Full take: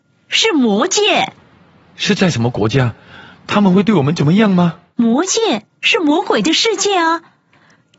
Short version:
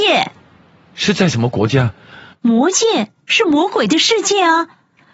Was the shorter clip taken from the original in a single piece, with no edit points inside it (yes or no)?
no